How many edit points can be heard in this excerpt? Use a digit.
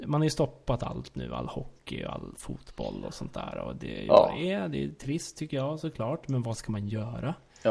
0